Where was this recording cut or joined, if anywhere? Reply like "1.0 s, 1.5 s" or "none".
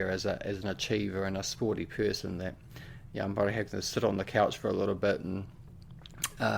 none